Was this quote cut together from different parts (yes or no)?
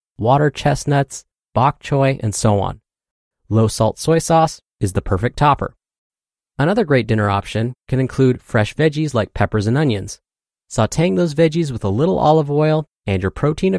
no